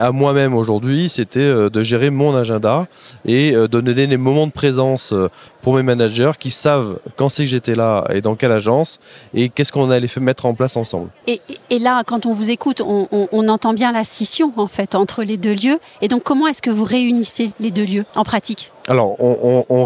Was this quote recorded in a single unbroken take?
no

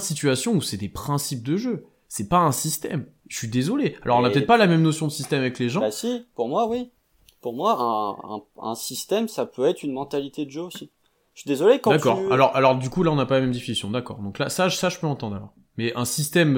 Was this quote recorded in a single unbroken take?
yes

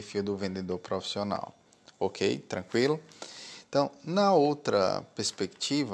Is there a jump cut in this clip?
no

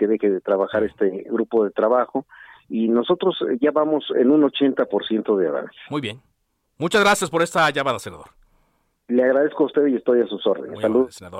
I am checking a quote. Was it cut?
no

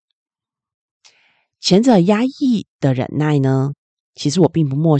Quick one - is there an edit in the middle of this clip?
no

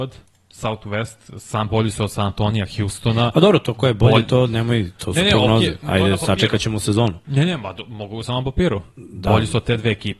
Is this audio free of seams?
yes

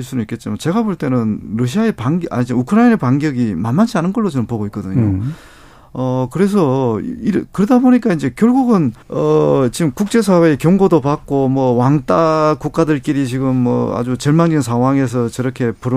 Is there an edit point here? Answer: yes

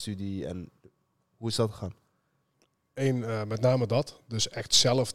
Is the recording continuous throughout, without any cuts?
yes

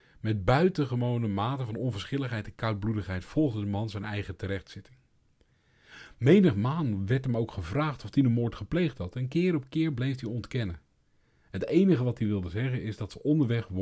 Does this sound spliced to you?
no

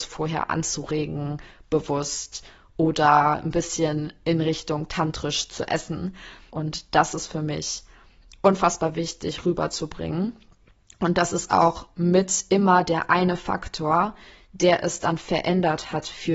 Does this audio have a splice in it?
yes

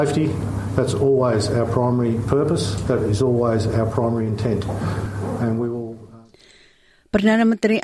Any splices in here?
no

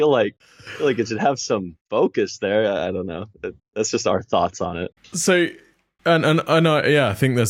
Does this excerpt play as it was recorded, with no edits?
yes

